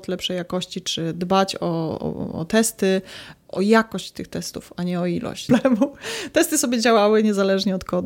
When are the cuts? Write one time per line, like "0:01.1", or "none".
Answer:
0:05.5